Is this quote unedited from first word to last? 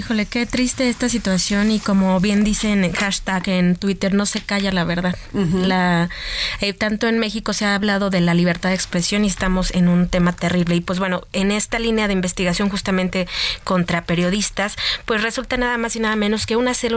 yes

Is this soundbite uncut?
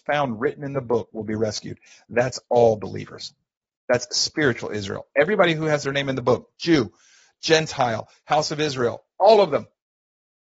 yes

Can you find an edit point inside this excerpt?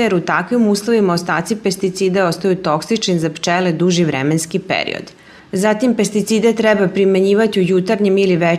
yes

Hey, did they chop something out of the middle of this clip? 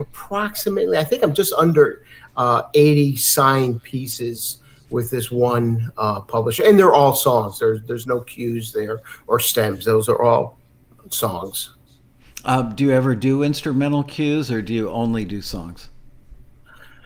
no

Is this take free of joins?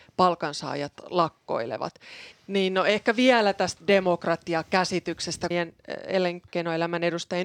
no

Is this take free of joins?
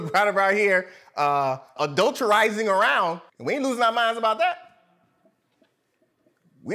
no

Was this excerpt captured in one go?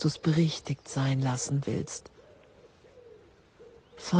yes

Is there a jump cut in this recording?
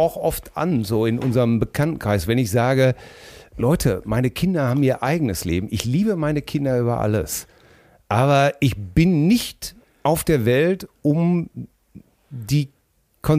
no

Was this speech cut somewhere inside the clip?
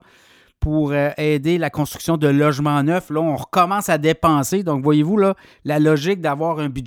no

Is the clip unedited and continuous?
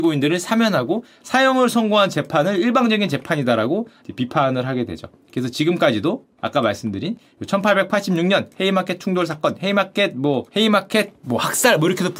no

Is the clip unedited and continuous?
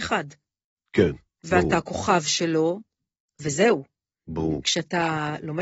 yes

